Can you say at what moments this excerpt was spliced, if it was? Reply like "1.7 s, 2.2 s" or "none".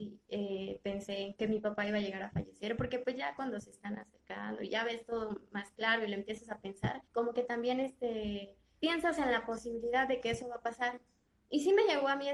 1.3 s, 7.1 s, 8.8 s